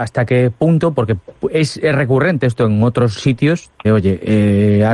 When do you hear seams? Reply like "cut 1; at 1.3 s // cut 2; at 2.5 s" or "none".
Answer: cut 1; at 3.8 s